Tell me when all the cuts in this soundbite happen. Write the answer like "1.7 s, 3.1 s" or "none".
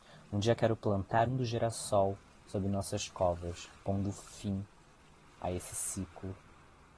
1.3 s, 3.8 s